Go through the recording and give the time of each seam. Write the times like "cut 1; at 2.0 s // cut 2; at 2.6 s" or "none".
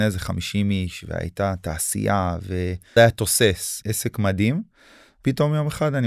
cut 1; at 3.0 s